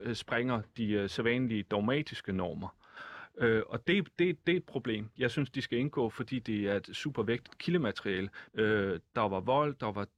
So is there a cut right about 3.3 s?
no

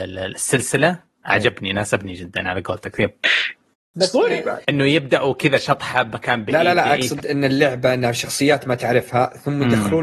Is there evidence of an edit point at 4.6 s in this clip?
yes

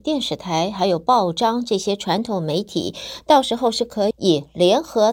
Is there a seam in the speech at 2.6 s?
no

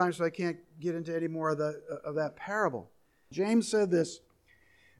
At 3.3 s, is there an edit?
yes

